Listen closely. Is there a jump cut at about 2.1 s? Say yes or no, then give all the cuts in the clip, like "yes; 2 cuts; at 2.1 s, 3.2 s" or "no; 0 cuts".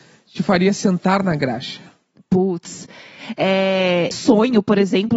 no; 1 cut; at 4.1 s